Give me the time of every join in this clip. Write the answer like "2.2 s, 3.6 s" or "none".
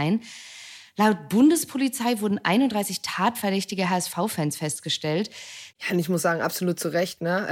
5.7 s